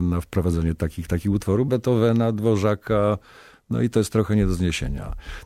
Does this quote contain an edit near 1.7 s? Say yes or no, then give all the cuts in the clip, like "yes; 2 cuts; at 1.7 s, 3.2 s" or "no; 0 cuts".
yes; 1 cut; at 1.7 s